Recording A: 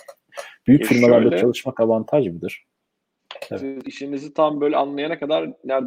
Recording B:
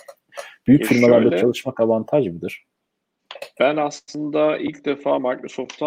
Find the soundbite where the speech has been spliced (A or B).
A